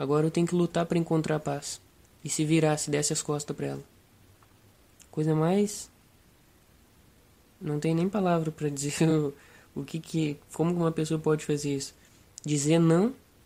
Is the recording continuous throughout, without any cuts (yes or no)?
yes